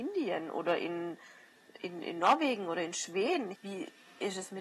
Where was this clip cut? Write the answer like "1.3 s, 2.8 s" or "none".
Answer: 3.5 s